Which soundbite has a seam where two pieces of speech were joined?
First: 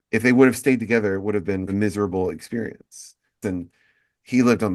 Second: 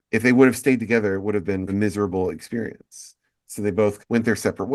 first; 1 cut; at 3.4 s

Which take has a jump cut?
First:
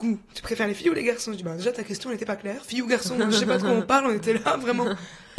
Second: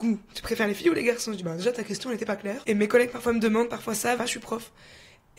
second; 2 cuts; at 2.6 s, 4.2 s

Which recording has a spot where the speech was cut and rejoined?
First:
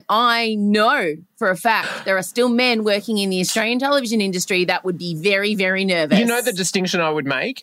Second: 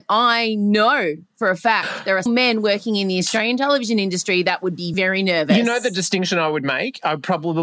second; 2 cuts; at 2.3 s, 4.9 s

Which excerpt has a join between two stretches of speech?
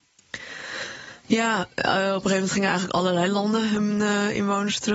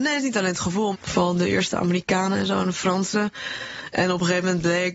second; 1 cut; at 0.9 s

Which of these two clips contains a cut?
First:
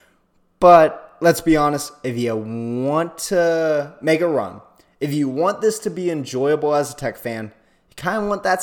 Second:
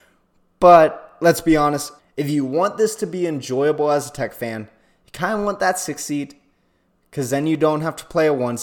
second; 1 cut; at 2.0 s

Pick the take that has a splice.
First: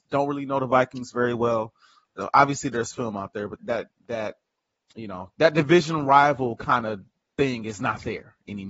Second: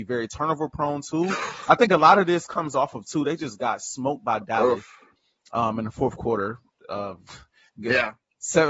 first; 2 cuts; at 3.6 s, 5.3 s

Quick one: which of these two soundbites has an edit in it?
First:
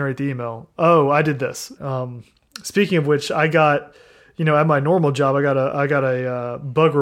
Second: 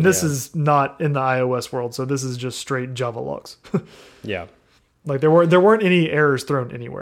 first; 1 cut; at 1.7 s

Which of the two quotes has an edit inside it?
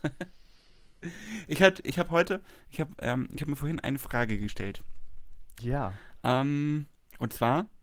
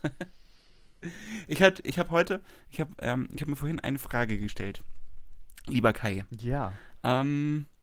first; 1 cut; at 5.6 s

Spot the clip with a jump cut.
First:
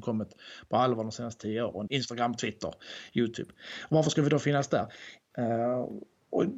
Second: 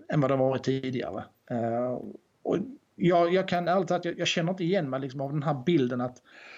first; 2 cuts; at 1.9 s, 5.3 s

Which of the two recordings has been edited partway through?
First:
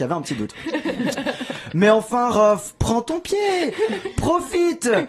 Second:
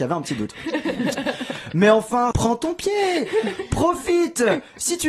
second; 1 cut; at 2.3 s

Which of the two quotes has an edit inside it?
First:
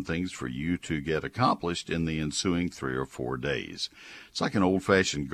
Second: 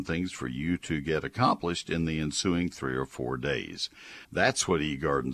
second; 1 cut; at 4.2 s

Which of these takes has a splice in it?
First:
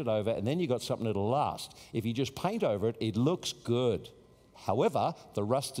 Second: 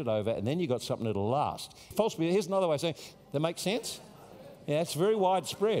second; 2 cuts; at 1.9 s, 3.1 s

